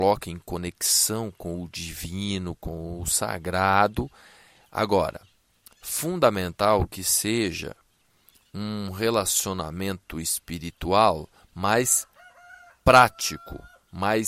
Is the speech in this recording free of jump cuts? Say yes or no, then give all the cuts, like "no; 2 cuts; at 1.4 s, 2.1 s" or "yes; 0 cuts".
yes; 0 cuts